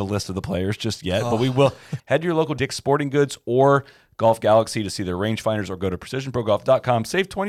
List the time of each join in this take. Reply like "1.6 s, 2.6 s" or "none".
2.0 s